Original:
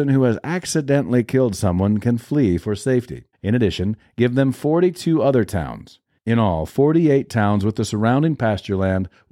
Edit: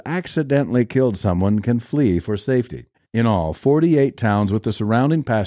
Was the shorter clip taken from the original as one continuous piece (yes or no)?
no